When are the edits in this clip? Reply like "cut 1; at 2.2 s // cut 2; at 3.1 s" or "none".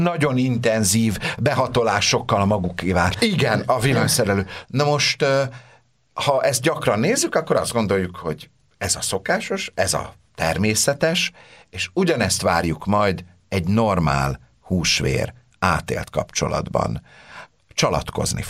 cut 1; at 3.1 s // cut 2; at 4.6 s